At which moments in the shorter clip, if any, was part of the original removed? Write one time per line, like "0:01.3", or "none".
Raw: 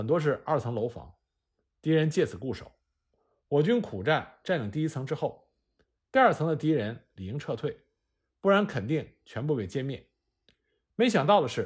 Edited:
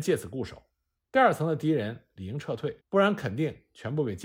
0:01.0
0:02.8